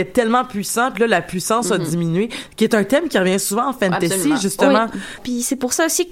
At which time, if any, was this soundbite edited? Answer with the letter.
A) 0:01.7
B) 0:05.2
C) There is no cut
B